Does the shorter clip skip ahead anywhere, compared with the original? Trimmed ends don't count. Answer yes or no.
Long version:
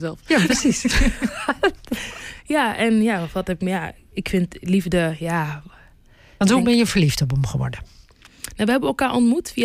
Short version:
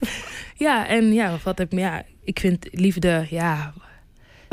no